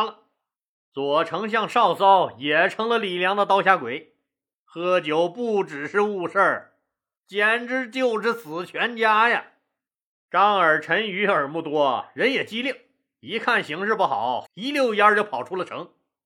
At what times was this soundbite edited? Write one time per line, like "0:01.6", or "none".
0:04.6
0:14.5